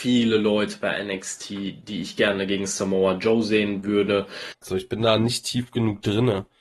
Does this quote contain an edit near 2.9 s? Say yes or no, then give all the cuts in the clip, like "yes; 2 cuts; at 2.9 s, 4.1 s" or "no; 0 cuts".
no; 1 cut; at 4.6 s